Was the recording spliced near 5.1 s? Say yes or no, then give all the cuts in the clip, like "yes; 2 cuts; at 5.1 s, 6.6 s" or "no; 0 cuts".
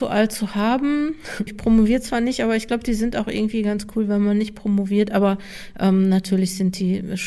no; 1 cut; at 1.5 s